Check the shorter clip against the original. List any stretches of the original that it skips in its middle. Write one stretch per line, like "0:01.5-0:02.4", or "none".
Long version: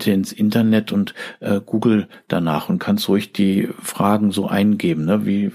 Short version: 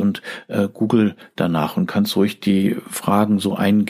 none